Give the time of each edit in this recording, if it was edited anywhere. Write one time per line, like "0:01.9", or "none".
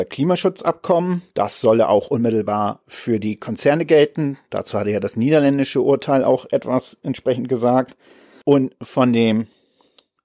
0:08.4